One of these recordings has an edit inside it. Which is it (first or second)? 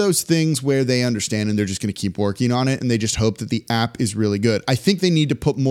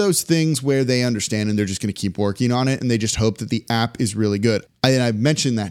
second